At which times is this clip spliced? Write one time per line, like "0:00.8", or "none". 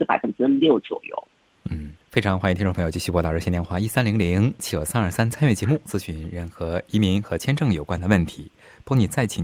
0:02.0
0:04.7